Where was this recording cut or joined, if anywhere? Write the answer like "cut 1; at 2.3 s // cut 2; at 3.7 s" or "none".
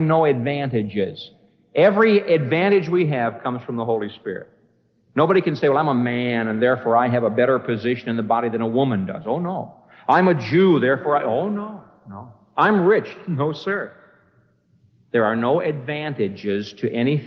none

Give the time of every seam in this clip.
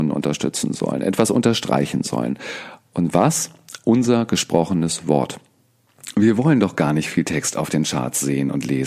none

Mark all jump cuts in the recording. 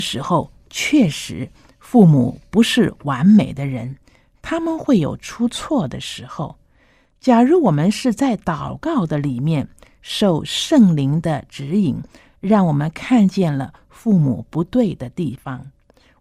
none

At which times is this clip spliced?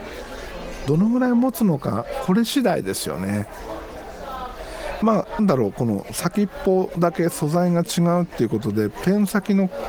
cut 1; at 5.4 s

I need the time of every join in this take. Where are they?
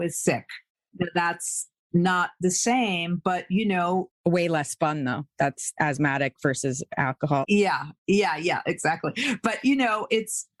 none

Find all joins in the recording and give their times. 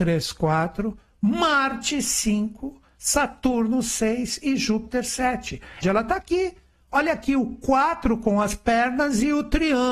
cut 1; at 5.8 s

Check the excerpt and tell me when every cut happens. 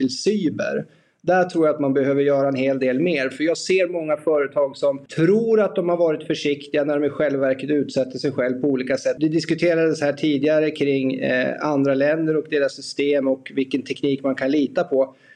cut 1; at 5.1 s // cut 2; at 9.2 s

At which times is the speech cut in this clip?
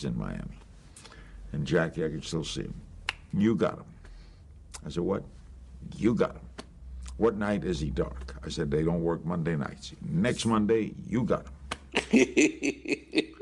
none

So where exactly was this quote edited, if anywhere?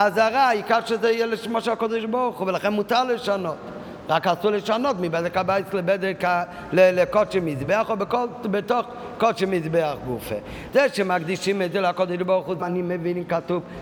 cut 1; at 10.7 s // cut 2; at 12.6 s

